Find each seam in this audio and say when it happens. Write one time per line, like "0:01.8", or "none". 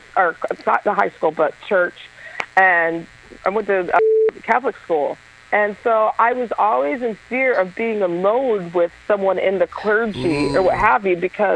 none